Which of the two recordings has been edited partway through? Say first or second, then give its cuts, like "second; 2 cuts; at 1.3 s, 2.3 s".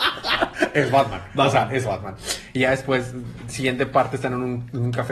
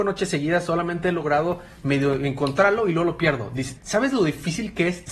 second; 1 cut; at 3.7 s